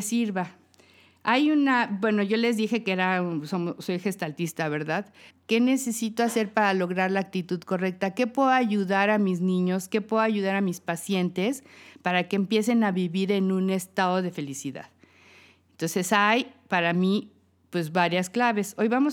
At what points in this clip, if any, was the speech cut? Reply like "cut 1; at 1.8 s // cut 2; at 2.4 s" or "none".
cut 1; at 5.3 s